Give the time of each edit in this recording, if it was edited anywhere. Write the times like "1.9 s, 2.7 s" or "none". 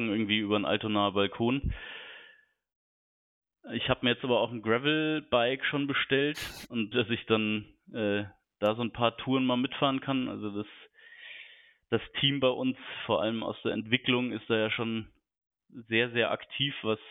6.9 s

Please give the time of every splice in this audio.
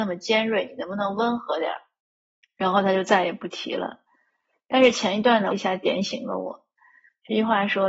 5.5 s

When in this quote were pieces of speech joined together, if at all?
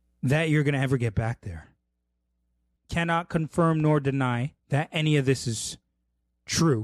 2.8 s, 4.6 s

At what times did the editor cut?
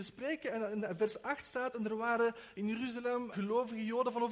3.3 s

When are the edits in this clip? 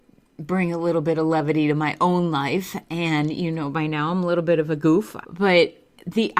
5.2 s

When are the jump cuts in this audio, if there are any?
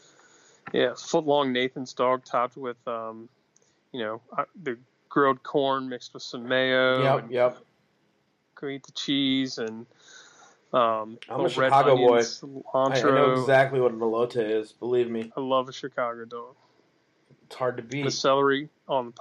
15.3 s

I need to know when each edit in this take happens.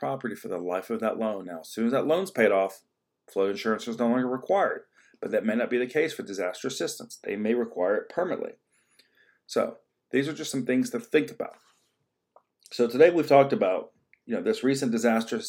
none

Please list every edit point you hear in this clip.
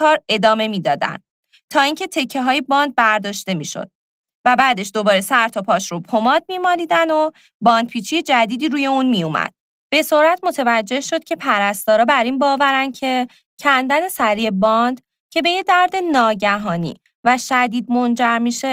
9.8 s

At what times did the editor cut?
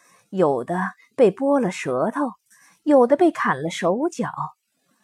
none

